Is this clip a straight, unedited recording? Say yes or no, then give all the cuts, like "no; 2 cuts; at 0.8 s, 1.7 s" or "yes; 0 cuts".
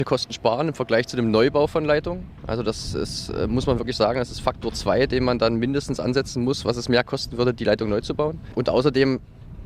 yes; 0 cuts